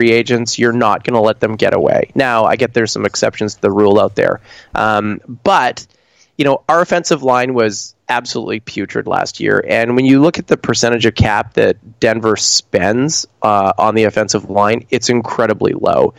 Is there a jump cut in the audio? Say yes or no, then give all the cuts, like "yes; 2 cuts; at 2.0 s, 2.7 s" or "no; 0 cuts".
no; 0 cuts